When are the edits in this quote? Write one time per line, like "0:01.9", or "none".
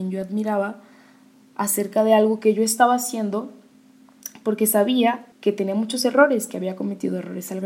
0:05.3